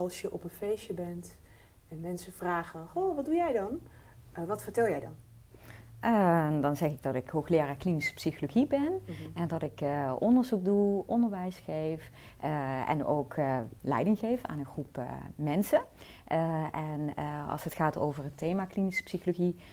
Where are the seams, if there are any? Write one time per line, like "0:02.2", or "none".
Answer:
none